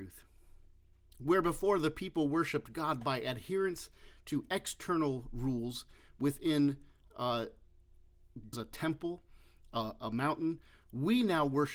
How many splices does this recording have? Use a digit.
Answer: 2